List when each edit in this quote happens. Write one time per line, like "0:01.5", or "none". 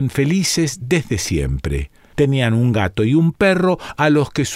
0:02.1